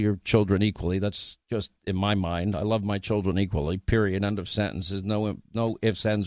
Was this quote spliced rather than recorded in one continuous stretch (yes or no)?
no